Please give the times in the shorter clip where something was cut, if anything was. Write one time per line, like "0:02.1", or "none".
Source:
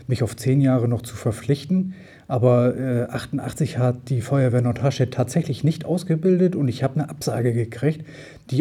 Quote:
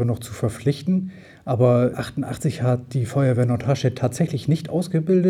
0:01.9